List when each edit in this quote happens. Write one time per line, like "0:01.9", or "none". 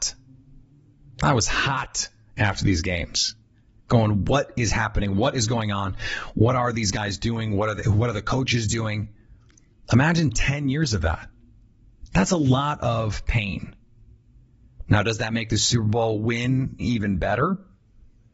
0:16.8

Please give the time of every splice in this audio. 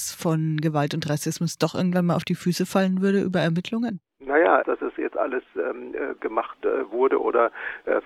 0:04.6
0:06.2

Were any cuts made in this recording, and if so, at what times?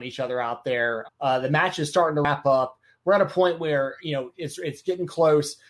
0:01.1

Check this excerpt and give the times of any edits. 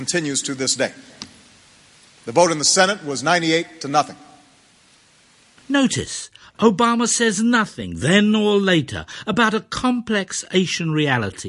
0:05.6

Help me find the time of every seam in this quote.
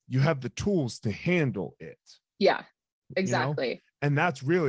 none

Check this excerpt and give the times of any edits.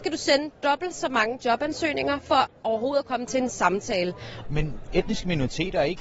0:04.4

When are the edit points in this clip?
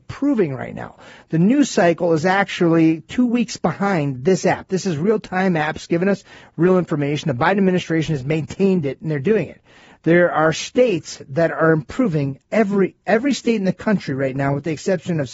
none

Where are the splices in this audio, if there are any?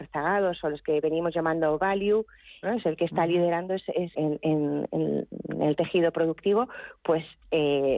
0:02.6
0:04.1

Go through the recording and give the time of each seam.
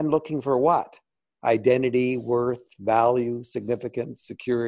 none

